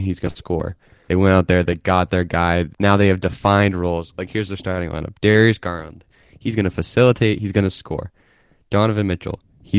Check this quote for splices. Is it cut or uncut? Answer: cut